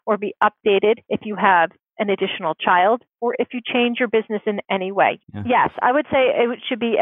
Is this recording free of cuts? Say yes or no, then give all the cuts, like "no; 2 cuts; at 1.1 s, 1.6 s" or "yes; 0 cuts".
no; 2 cuts; at 1.0 s, 5.2 s